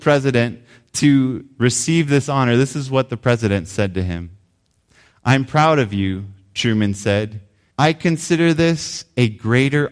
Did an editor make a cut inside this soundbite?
yes; 1 cut; at 7.7 s

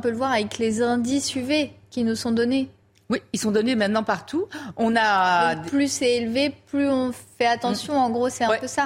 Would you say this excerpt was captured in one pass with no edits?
yes; 0 cuts

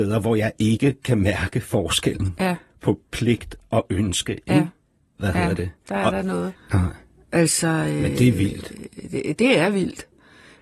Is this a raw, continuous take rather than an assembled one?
no; 2 cuts; at 5.2 s, 6.6 s

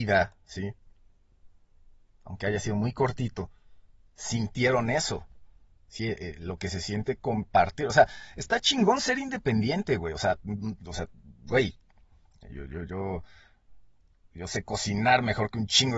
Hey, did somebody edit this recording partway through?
no; 0 cuts

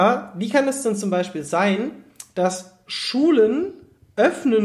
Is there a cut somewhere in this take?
no; 0 cuts

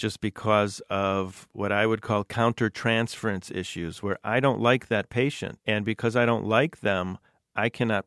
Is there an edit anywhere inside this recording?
no; 0 cuts

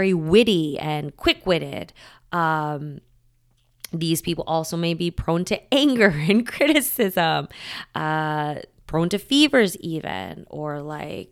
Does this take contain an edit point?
no; 0 cuts

